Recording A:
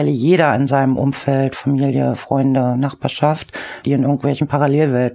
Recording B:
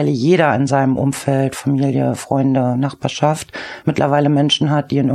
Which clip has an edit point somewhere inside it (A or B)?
A